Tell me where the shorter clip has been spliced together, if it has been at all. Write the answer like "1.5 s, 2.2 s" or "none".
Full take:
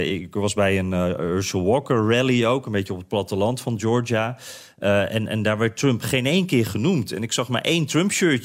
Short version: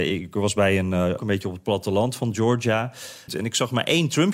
1.2 s, 3.3 s

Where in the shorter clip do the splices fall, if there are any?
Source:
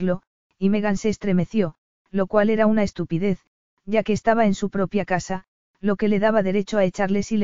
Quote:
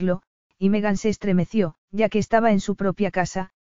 1.9 s

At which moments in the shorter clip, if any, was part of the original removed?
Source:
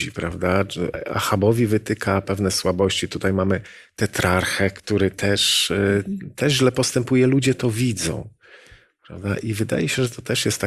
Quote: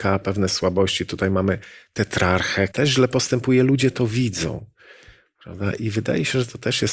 2.7 s

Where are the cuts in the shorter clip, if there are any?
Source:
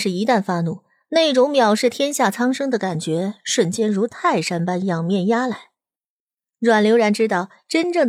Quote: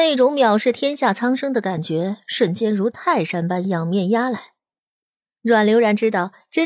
none

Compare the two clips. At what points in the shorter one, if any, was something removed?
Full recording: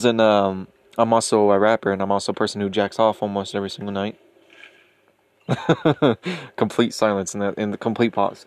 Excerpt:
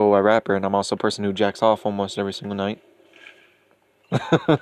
none

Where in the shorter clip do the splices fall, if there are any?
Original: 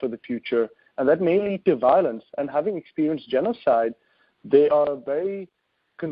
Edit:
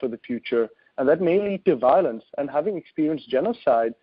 none

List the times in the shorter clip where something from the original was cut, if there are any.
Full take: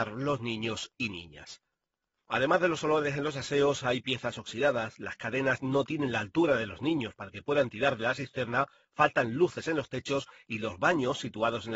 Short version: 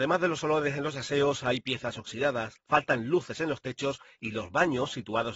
2.6 s

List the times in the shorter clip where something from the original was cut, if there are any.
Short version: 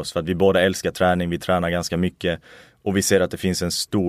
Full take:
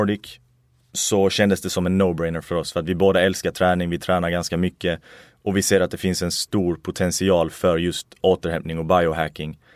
none

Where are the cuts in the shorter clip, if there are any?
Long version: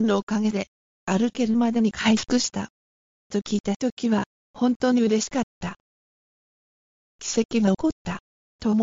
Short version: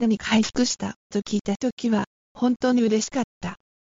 1.0 s

